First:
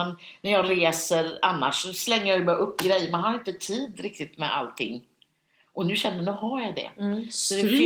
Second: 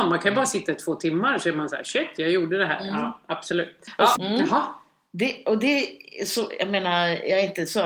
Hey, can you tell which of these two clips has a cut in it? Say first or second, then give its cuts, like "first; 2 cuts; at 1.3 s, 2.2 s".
second; 1 cut; at 4.1 s